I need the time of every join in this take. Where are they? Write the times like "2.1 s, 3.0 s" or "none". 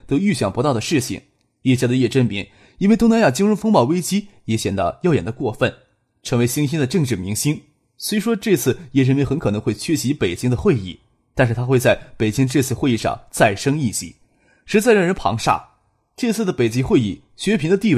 none